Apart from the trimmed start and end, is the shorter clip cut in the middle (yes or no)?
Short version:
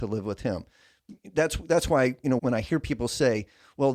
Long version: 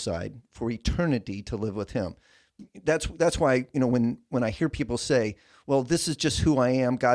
yes